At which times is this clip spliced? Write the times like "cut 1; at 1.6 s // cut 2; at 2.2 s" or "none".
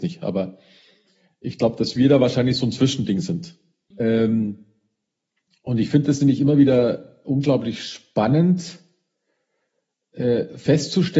cut 1; at 3.9 s